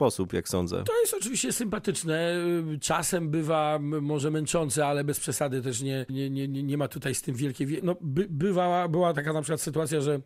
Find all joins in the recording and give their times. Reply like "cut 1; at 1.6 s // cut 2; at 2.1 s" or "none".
cut 1; at 6.1 s // cut 2; at 7.8 s